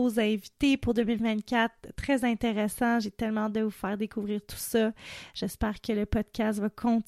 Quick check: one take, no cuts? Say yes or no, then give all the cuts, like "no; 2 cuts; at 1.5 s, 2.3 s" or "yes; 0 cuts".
yes; 0 cuts